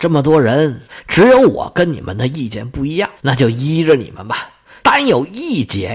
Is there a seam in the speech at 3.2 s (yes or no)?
yes